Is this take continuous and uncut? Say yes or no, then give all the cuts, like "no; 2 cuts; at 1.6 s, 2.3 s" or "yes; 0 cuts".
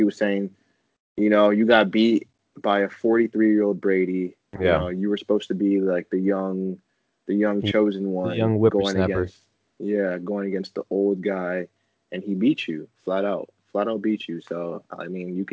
yes; 0 cuts